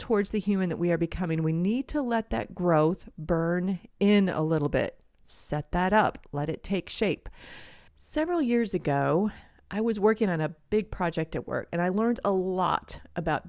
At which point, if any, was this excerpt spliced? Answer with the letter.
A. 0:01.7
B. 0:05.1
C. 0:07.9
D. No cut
C